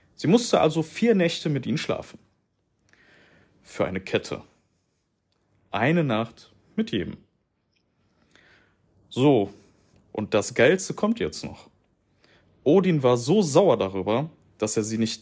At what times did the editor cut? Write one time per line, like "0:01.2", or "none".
none